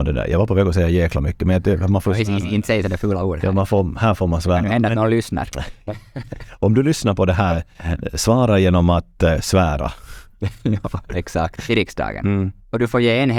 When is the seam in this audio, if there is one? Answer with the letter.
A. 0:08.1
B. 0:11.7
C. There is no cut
B